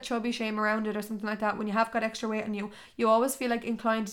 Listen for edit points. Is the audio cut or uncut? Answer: uncut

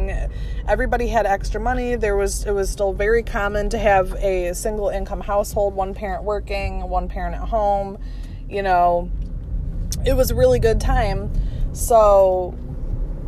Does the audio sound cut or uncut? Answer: uncut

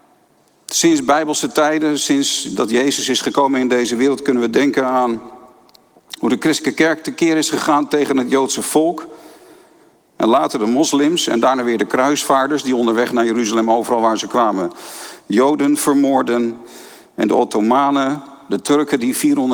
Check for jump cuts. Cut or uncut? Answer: uncut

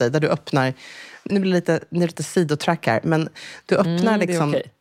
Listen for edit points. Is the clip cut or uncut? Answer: cut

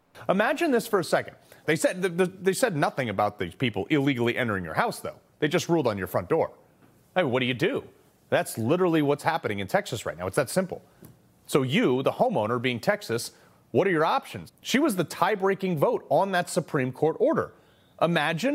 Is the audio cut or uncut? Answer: cut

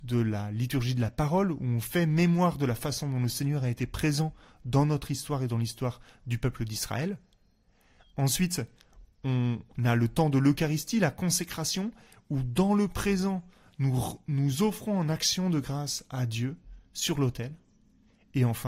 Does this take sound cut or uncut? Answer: uncut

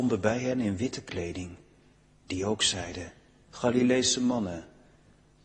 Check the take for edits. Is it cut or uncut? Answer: uncut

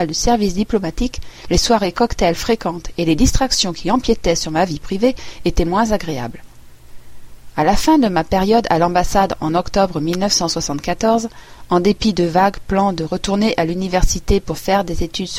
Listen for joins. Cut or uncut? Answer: uncut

